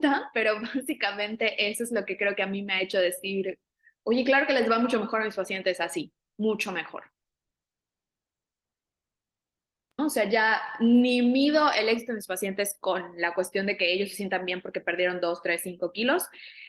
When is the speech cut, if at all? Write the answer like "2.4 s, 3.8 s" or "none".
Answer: 10.0 s